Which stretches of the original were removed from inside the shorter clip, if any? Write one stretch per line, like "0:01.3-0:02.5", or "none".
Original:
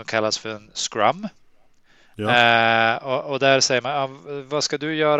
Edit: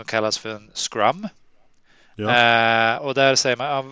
0:03.0-0:03.2